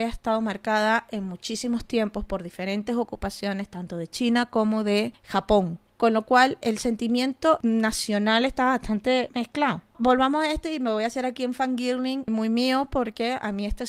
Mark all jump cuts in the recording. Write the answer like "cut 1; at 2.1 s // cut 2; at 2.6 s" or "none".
cut 1; at 12.3 s